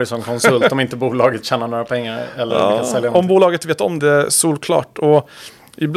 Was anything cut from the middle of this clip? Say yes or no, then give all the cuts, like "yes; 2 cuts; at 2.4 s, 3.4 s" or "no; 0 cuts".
yes; 1 cut; at 4.0 s